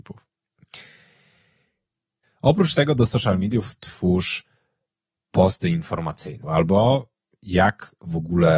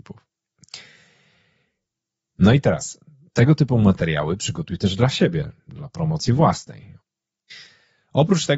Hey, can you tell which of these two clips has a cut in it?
first; 2 cuts; at 2.2 s, 6.4 s

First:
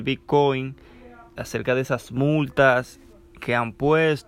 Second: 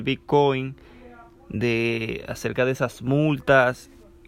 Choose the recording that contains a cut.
first; 1 cut; at 1.4 s

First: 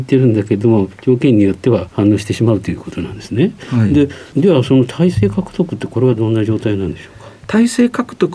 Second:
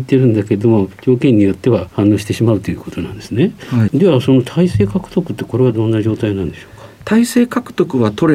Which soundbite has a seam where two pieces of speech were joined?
second; 1 cut; at 3.9 s

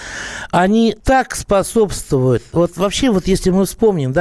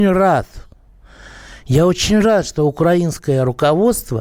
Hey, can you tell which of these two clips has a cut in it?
first; 1 cut; at 1.0 s

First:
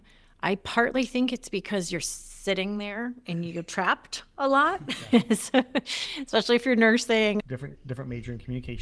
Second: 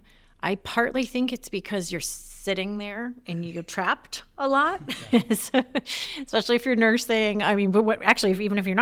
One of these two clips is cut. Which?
first; 1 cut; at 7.4 s

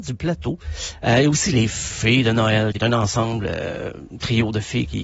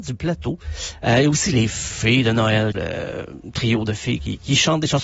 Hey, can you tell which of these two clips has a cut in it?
second; 1 cut; at 2.7 s

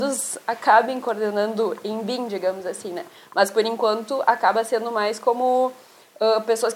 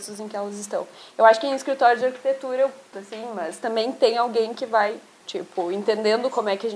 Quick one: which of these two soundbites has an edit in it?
second; 2 cuts; at 2.9 s, 5.2 s

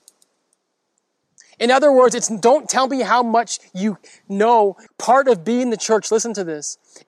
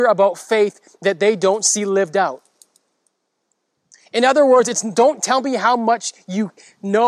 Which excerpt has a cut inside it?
first; 1 cut; at 4.9 s

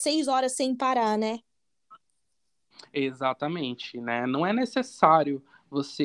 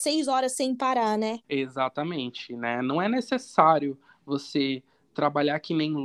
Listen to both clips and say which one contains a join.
second; 1 cut; at 1.4 s

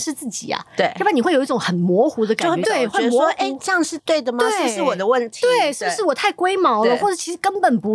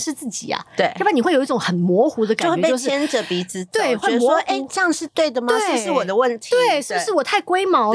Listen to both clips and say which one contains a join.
first; 1 cut; at 2.6 s

